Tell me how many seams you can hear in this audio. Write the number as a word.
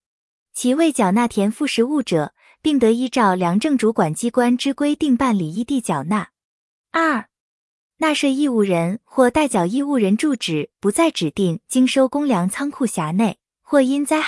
zero